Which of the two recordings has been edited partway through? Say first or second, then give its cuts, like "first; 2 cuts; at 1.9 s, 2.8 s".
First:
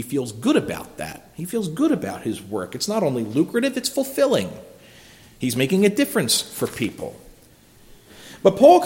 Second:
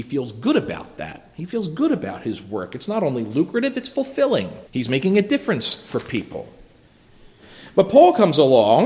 second; 1 cut; at 4.7 s